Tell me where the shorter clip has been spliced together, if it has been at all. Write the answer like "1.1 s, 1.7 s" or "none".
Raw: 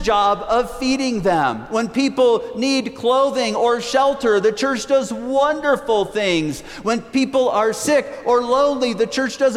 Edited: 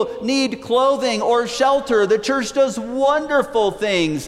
none